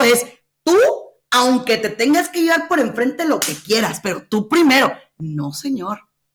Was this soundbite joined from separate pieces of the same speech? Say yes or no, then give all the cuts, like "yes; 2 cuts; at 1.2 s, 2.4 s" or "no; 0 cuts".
no; 0 cuts